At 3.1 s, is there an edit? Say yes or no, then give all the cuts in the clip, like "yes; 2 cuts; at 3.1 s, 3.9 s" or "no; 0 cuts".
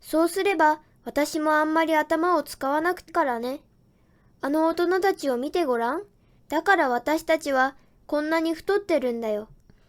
yes; 2 cuts; at 3.1 s, 6.4 s